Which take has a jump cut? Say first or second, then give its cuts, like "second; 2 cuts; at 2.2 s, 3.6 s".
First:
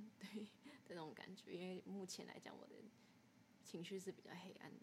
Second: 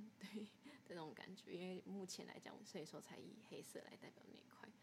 second; 1 cut; at 2.6 s